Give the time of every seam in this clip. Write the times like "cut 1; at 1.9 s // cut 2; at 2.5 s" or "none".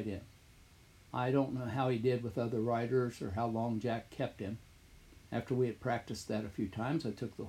cut 1; at 1.0 s // cut 2; at 5.3 s